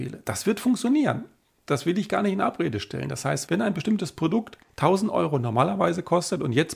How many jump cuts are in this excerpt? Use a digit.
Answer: 2